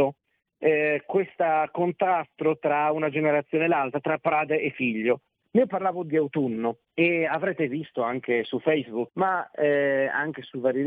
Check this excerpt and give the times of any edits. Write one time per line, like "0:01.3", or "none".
0:05.4
0:06.9
0:09.1